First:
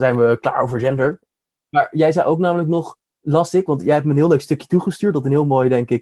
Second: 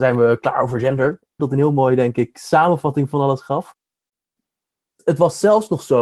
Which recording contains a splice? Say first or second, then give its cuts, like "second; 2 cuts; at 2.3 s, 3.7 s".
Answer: second; 1 cut; at 1.4 s